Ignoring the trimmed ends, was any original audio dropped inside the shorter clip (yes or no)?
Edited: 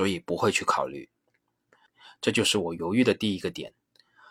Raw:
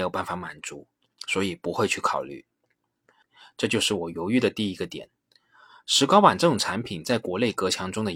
no